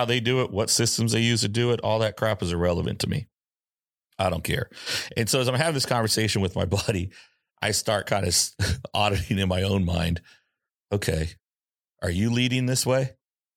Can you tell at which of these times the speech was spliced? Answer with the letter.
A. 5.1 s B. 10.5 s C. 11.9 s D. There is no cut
D